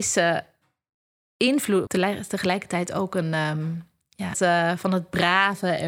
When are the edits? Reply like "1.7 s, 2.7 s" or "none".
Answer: 1.9 s, 4.3 s